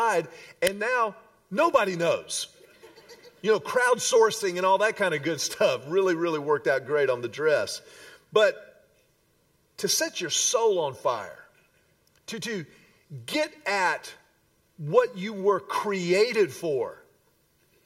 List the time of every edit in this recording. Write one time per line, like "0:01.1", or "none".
none